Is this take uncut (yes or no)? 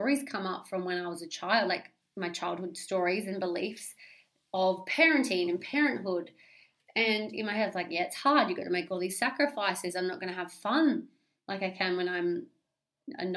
yes